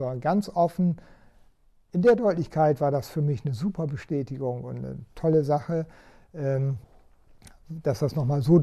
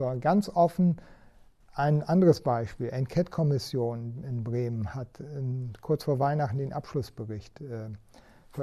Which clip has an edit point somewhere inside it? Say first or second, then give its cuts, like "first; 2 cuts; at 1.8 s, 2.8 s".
second; 1 cut; at 1.6 s